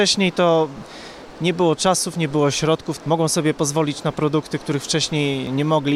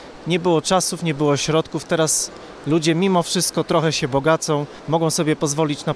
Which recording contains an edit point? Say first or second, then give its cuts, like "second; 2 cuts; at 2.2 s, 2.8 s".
first; 1 cut; at 3.0 s